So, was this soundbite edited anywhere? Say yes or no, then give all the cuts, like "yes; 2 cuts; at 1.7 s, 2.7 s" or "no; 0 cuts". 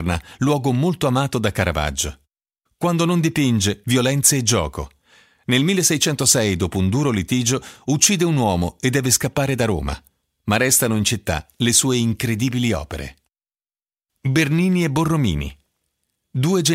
yes; 1 cut; at 3.8 s